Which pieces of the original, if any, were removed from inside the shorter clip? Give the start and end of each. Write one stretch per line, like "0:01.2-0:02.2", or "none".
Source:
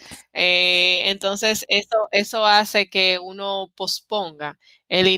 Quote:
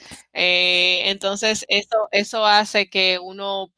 none